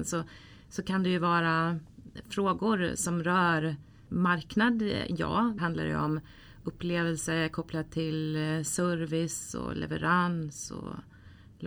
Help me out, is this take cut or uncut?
cut